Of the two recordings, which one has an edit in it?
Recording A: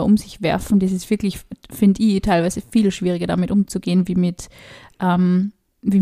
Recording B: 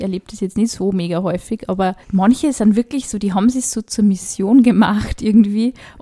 B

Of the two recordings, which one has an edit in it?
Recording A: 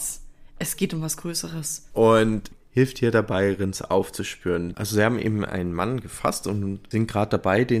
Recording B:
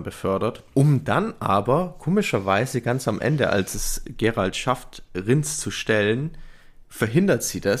A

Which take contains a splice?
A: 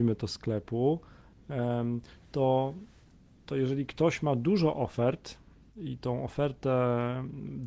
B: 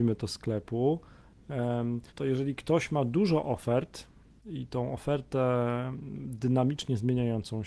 B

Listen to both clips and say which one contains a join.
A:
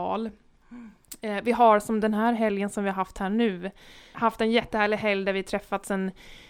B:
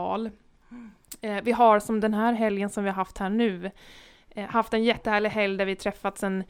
A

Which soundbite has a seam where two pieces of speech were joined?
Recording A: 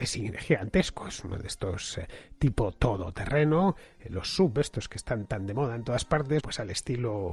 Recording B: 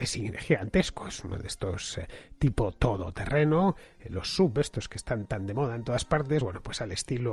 A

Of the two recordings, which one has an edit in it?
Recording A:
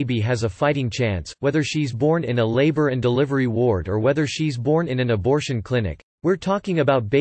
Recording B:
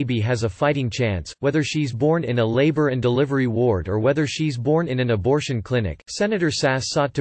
A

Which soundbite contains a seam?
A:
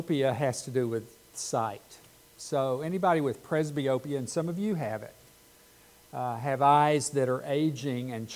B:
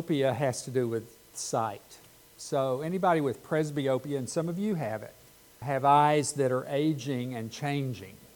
B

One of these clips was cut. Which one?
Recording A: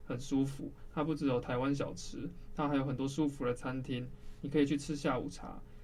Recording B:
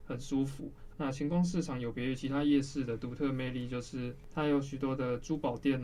B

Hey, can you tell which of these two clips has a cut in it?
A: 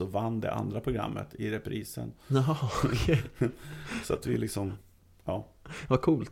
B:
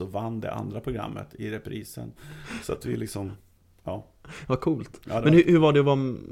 B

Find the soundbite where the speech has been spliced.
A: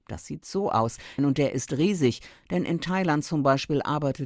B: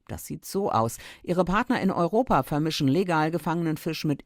A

